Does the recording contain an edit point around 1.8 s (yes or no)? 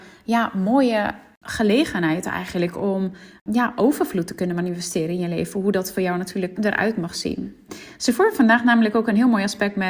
no